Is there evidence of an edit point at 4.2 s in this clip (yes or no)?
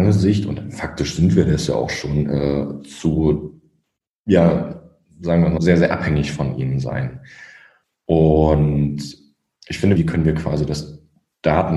no